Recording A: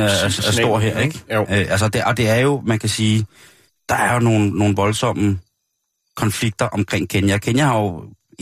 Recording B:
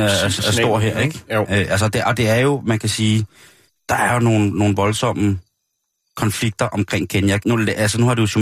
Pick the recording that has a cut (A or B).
B